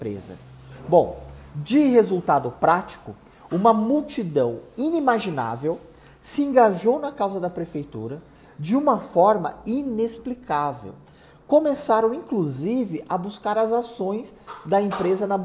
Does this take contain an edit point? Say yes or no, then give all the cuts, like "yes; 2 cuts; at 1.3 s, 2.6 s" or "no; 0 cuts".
no; 0 cuts